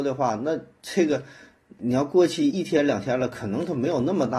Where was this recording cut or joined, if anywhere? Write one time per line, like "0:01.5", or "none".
0:02.5